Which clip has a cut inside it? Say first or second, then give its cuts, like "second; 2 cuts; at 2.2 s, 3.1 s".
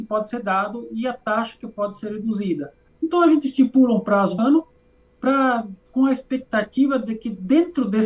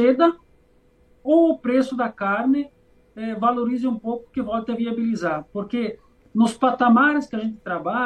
first; 3 cuts; at 2.9 s, 4.4 s, 5.8 s